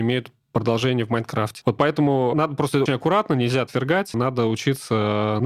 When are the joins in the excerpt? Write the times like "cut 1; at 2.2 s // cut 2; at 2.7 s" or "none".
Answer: cut 1; at 1.6 s // cut 2; at 2.9 s // cut 3; at 4.1 s